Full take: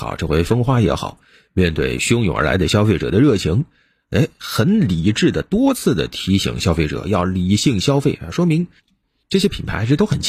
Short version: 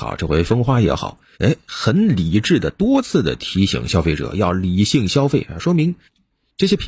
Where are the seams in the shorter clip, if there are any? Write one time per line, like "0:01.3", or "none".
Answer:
0:01.3